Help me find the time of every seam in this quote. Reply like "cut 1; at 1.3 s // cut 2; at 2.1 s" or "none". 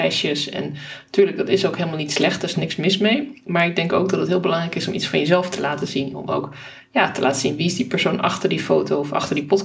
none